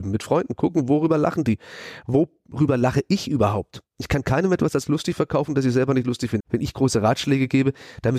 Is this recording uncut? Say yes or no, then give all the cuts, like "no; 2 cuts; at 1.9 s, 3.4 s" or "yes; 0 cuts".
no; 1 cut; at 6.4 s